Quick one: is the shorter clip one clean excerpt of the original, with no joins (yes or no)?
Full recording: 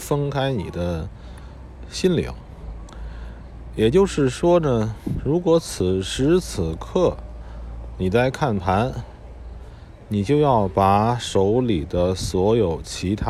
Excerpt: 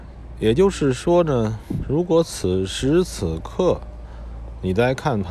yes